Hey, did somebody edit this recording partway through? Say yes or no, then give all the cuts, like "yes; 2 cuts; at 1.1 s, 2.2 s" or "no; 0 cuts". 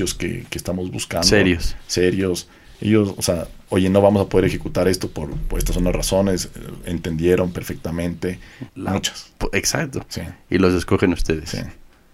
yes; 2 cuts; at 2.7 s, 8.7 s